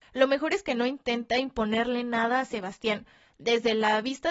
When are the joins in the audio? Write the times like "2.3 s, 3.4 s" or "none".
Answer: 3.3 s